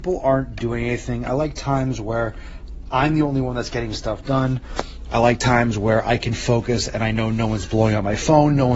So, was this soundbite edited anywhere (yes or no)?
no